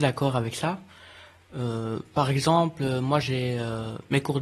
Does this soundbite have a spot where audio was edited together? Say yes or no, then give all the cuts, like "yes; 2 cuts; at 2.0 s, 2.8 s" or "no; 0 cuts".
no; 0 cuts